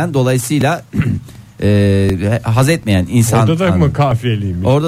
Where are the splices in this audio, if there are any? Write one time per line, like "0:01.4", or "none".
none